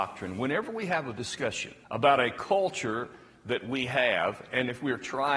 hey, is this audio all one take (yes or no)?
no